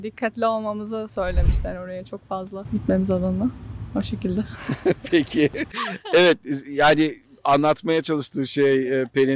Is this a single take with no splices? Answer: yes; 0 cuts

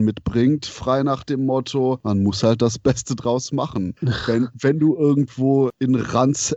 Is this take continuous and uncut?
yes; 0 cuts

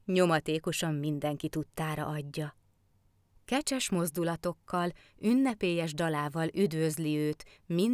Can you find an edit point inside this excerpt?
yes; 1 cut; at 3.4 s

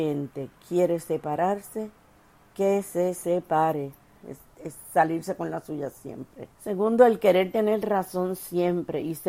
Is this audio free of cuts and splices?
no; 2 cuts; at 4.2 s, 6.5 s

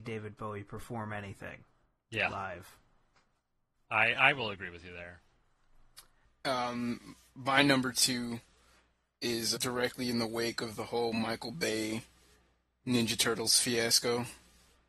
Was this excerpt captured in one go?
no; 2 cuts; at 6.2 s, 9.5 s

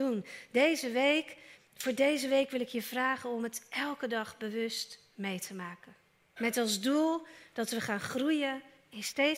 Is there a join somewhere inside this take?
yes; 2 cuts; at 1.6 s, 6.4 s

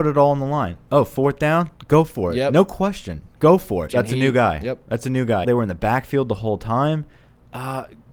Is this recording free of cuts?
no; 2 cuts; at 3.9 s, 5.4 s

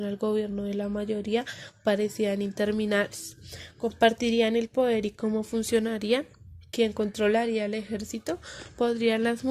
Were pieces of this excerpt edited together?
no; 0 cuts

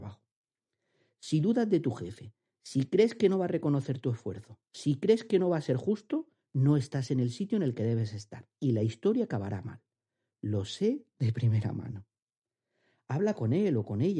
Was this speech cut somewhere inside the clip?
no; 0 cuts

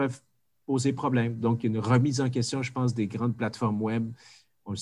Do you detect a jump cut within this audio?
no; 0 cuts

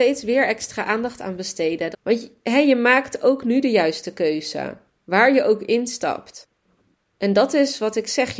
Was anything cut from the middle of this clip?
yes; 1 cut; at 1.9 s

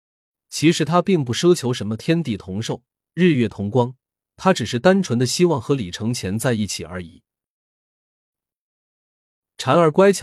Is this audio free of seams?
no; 1 cut; at 8.4 s

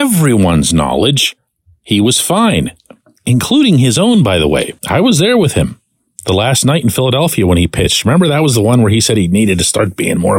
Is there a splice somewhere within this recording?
yes; 1 cut; at 4.8 s

